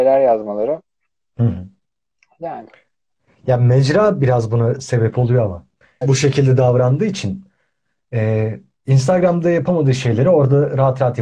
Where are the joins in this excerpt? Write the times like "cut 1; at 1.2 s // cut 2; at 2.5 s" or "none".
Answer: cut 1; at 6.0 s